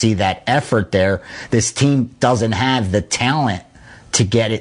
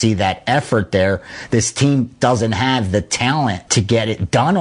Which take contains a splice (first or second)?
second